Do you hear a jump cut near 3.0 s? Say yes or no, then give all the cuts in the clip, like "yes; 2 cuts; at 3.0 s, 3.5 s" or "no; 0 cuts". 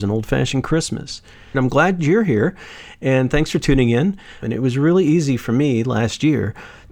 no; 2 cuts; at 1.5 s, 4.4 s